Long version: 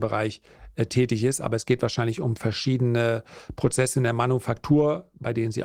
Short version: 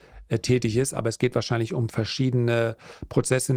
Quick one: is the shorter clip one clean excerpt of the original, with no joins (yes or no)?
yes